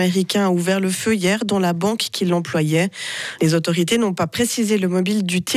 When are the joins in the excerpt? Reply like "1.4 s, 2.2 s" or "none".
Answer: 3.4 s